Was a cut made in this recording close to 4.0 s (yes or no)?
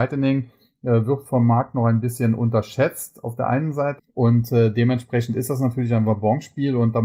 yes